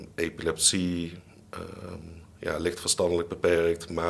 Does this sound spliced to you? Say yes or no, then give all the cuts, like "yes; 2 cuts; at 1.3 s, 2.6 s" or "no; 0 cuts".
no; 0 cuts